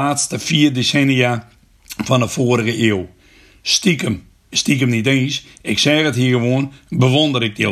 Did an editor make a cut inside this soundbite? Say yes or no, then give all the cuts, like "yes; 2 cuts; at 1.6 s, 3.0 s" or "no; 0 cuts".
yes; 1 cut; at 4.5 s